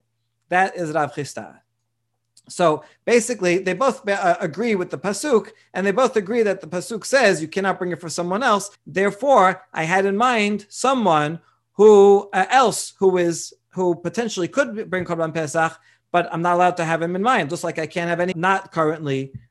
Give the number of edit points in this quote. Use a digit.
2